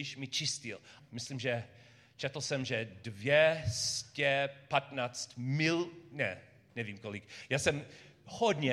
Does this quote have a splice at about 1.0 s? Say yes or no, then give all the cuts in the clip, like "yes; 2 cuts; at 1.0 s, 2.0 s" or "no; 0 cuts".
yes; 1 cut; at 1.0 s